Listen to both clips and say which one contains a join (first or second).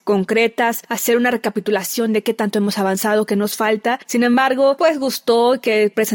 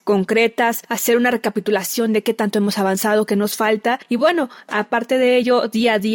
first